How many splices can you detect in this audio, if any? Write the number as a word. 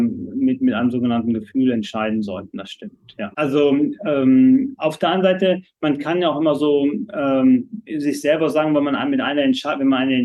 one